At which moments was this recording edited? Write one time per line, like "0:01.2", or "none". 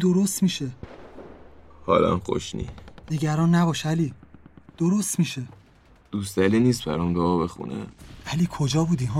none